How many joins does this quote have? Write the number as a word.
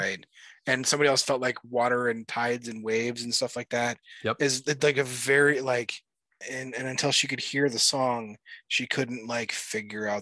one